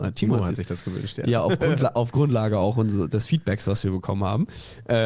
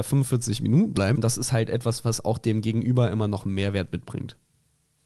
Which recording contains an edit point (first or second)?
second